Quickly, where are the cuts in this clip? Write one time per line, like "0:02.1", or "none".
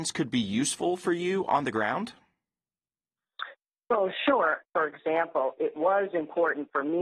0:04.7